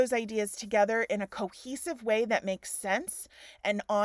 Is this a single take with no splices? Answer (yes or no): yes